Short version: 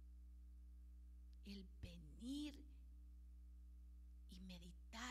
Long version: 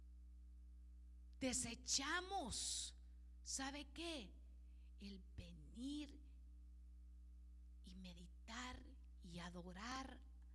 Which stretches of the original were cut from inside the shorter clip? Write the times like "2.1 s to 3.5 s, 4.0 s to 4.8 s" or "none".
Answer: 1.4 s to 4.9 s